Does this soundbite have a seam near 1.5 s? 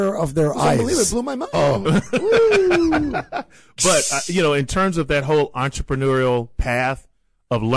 yes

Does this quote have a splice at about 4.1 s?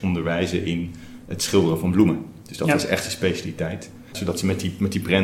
yes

